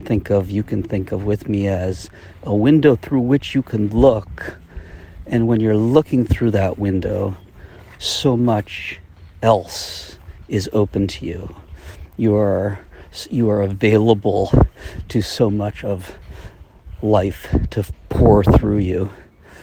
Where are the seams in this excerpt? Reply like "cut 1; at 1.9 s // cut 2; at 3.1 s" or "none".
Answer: none